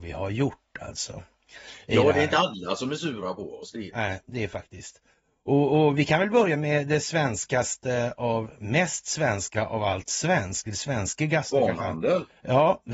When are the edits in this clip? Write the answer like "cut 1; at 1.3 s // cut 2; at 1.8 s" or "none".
cut 1; at 3.9 s